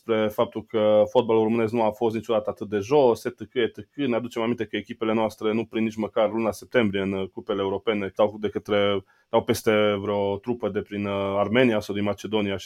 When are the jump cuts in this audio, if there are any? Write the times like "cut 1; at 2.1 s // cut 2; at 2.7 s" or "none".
cut 1; at 8.2 s